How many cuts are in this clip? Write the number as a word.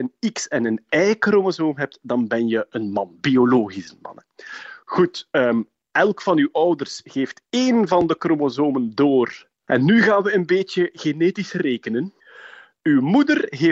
zero